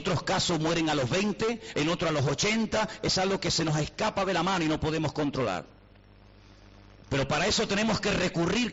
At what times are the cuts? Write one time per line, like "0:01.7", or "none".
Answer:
0:01.7